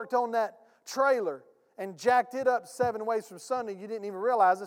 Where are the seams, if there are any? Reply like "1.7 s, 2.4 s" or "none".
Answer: none